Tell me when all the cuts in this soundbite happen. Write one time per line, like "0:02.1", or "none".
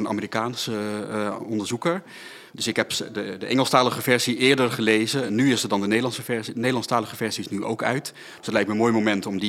none

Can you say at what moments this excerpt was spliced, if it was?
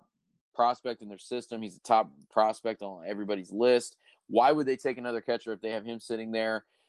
none

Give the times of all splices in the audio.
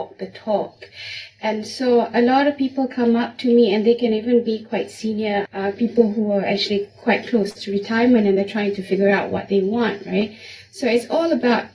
0:05.5

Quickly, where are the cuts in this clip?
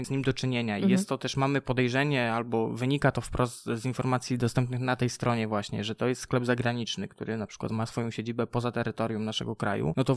none

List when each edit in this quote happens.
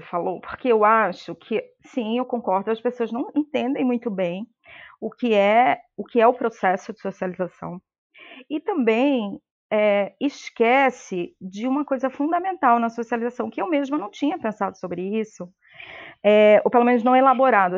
none

